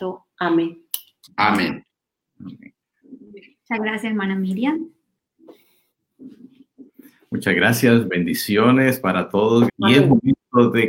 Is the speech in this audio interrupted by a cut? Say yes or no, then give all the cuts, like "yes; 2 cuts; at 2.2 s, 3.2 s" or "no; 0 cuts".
yes; 2 cuts; at 2.8 s, 9.7 s